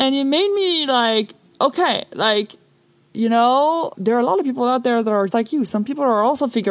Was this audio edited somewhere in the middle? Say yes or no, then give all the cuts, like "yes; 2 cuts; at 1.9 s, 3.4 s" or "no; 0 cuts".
yes; 2 cuts; at 3.9 s, 5.3 s